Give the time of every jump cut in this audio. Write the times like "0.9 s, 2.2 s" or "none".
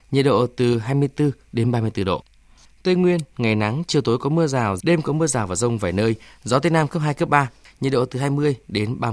4.8 s

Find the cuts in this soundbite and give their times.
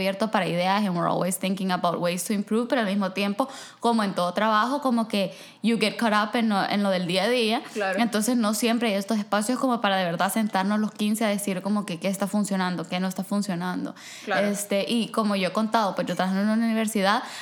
none

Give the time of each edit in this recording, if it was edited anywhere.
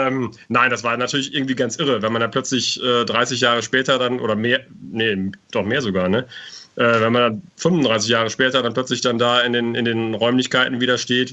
7.5 s

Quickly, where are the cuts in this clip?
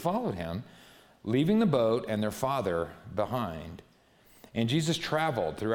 none

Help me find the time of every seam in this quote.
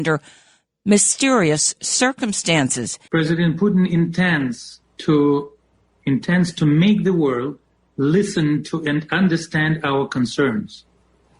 3.1 s

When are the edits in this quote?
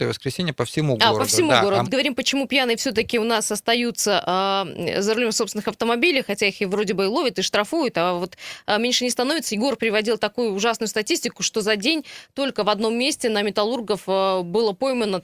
1.8 s

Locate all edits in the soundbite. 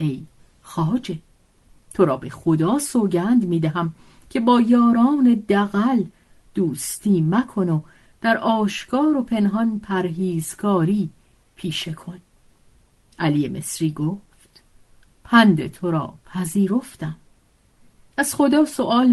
none

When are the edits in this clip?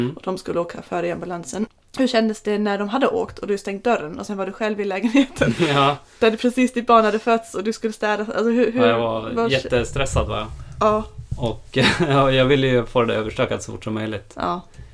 none

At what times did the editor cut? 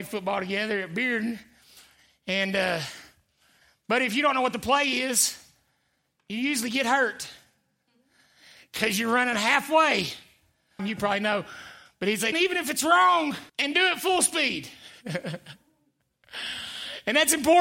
10.8 s, 12.3 s, 13.5 s

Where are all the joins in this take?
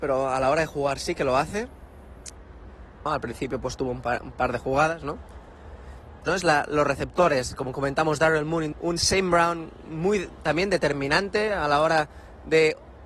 3.1 s, 6.3 s, 8.7 s

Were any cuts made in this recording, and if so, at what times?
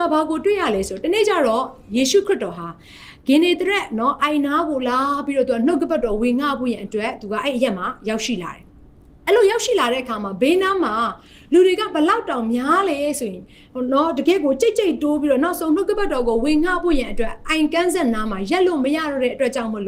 8.7 s

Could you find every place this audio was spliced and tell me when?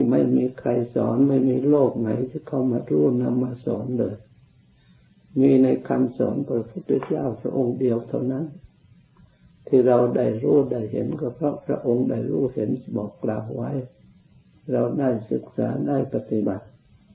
none

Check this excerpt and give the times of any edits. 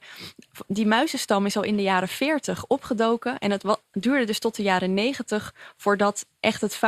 none

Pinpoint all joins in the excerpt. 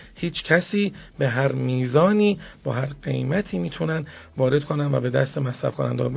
none

